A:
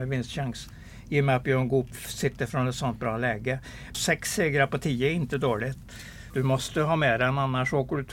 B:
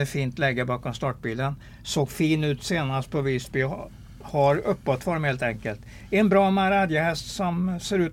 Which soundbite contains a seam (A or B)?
A